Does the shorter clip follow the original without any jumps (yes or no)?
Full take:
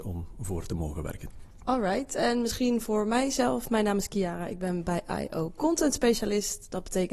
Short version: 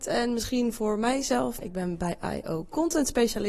no